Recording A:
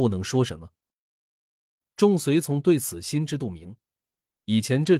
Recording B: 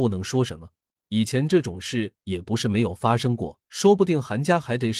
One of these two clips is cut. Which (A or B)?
B